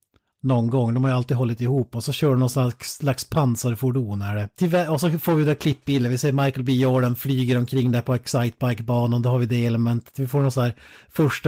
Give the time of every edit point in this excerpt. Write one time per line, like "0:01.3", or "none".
none